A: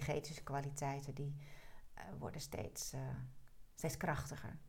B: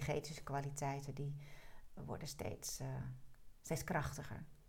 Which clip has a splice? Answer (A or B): B